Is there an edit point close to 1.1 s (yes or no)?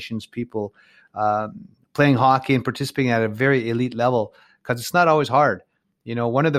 no